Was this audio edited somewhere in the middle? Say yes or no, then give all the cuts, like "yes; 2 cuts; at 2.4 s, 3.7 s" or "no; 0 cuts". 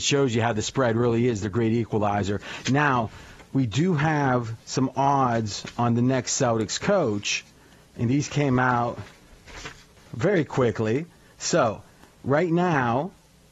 no; 0 cuts